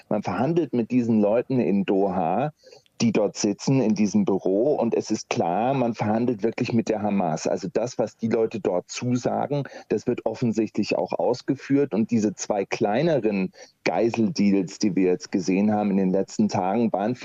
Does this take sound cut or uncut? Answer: uncut